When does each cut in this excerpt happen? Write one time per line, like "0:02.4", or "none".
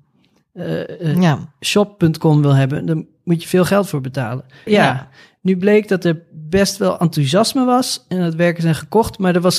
0:04.7